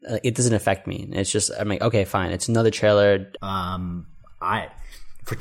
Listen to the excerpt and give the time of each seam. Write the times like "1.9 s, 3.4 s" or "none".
3.4 s